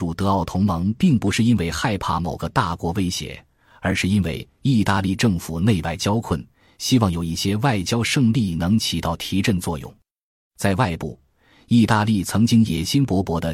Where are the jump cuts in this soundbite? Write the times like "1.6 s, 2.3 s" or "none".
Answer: none

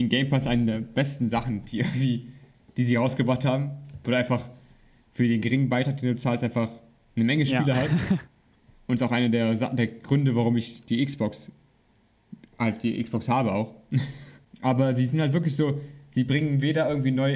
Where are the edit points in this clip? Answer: none

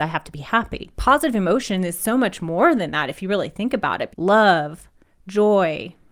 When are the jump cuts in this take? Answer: 0.9 s, 4.1 s

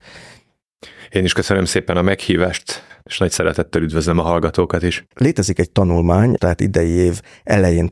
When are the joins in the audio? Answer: 5.1 s, 6.4 s

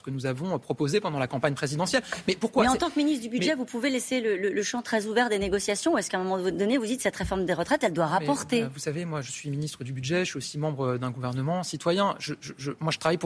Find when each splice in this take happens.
none

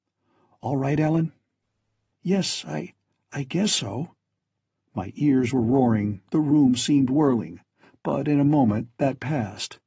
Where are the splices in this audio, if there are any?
none

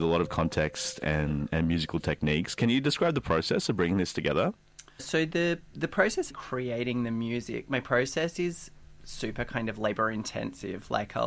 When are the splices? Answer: 5.0 s, 6.3 s

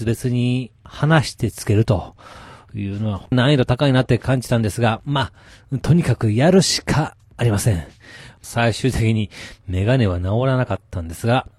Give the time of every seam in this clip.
3.3 s, 8.4 s

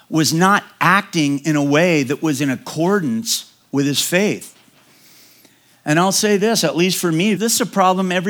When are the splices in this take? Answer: 7.4 s

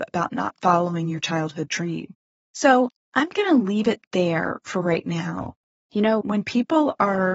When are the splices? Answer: 2.3 s

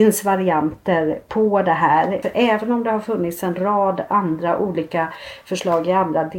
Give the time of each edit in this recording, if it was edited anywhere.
2.2 s

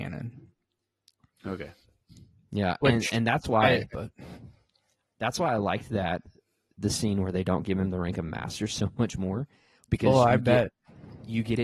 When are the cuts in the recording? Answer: 3.9 s

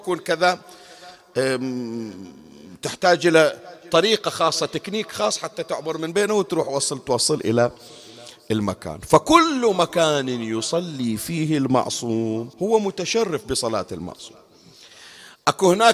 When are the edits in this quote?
12.5 s

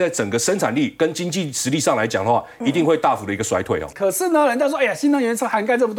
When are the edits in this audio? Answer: 3.9 s

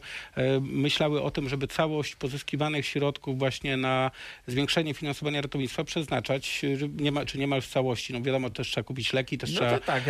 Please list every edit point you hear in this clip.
none

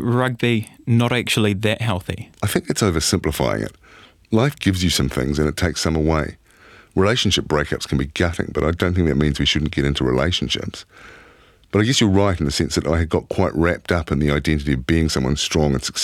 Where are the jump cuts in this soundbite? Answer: 2.3 s

